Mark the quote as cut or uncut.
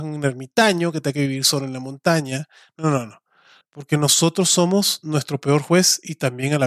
cut